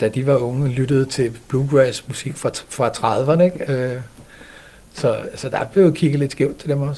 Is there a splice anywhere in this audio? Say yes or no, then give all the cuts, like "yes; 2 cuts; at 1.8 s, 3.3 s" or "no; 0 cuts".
yes; 1 cut; at 3.7 s